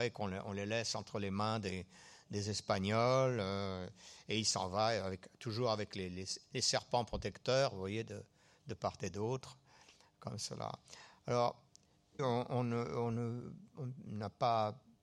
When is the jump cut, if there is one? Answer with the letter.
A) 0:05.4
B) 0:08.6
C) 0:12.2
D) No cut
C